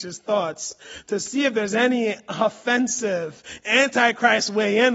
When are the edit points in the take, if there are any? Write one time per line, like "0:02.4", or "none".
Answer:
none